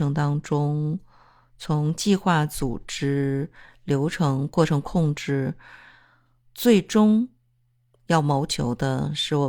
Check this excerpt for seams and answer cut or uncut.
uncut